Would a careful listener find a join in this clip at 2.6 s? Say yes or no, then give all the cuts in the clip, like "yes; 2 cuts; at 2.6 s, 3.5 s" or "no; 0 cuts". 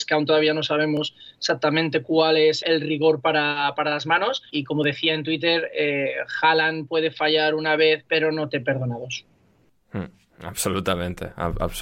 yes; 2 cuts; at 2.6 s, 4.5 s